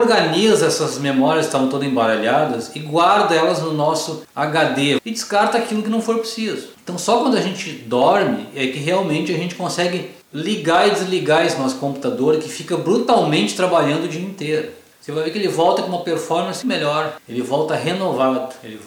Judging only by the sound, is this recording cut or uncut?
cut